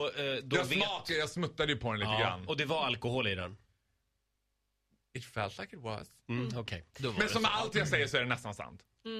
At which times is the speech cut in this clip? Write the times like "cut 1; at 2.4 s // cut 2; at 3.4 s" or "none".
none